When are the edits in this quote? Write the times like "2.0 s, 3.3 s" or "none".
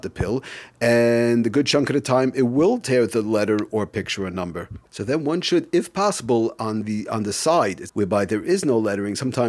4.9 s, 7.9 s